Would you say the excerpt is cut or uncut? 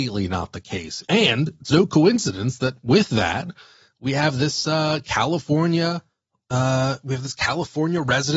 cut